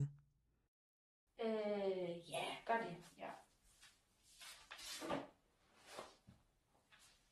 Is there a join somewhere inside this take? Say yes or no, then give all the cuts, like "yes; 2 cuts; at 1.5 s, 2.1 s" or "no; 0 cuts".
yes; 1 cut; at 1.3 s